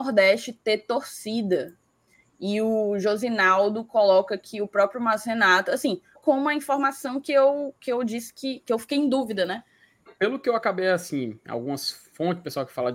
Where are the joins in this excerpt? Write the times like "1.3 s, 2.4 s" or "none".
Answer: 6.2 s, 10.1 s